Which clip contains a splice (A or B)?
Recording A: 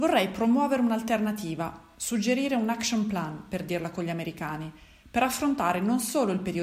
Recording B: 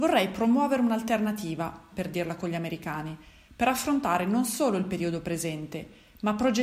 B